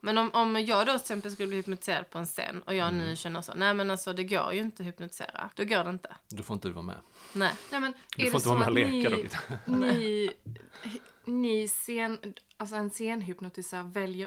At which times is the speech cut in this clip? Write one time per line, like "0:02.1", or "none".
0:05.5